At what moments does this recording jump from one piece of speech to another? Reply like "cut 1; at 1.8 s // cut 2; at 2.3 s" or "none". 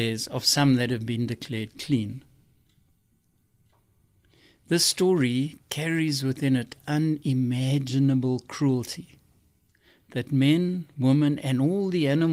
cut 1; at 11.4 s

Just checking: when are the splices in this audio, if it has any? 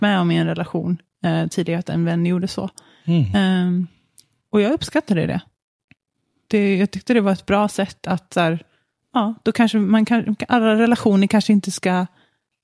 none

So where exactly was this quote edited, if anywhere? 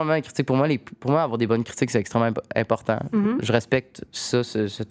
none

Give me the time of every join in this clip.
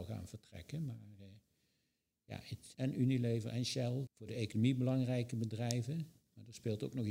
cut 1; at 2.7 s // cut 2; at 4.1 s

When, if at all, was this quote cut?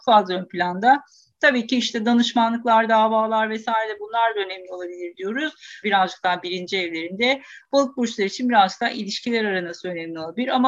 cut 1; at 5.8 s

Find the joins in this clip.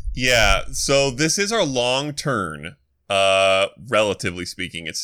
none

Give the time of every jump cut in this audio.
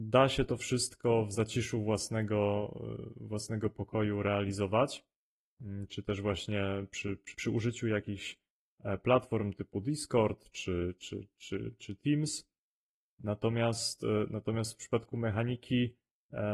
cut 1; at 7.3 s

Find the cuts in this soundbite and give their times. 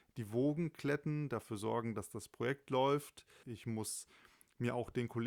cut 1; at 3.4 s

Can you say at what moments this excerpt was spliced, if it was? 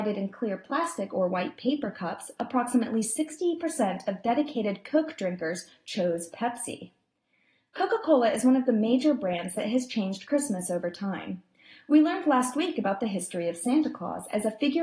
none

